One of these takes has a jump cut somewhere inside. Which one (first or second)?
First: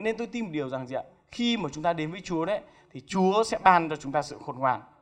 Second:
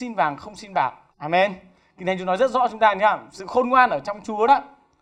second